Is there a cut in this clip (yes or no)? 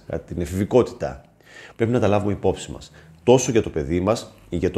yes